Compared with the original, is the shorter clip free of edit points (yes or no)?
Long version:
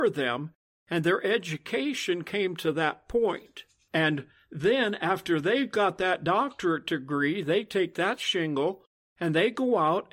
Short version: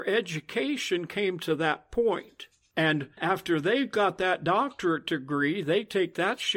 no